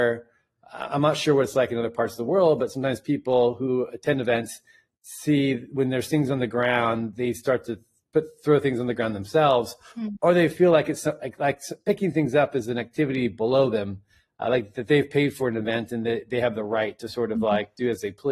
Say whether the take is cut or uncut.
uncut